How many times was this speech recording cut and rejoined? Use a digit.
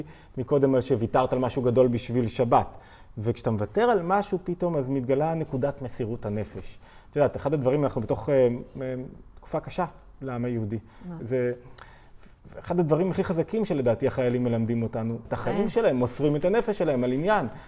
2